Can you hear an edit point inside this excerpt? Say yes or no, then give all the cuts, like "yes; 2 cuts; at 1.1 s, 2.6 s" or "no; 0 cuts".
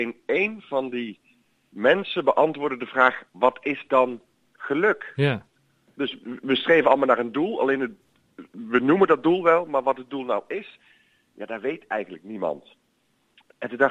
no; 0 cuts